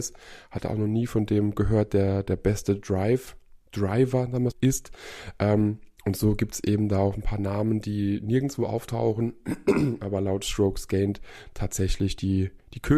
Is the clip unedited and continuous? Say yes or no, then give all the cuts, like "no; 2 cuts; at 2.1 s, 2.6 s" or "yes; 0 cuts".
no; 1 cut; at 4.5 s